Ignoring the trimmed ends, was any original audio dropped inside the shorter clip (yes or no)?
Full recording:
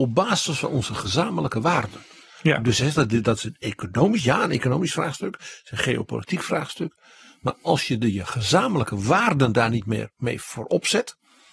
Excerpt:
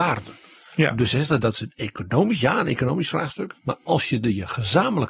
yes